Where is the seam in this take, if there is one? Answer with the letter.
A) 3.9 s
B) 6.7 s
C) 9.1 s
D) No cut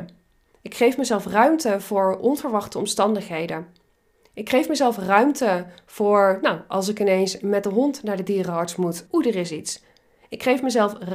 C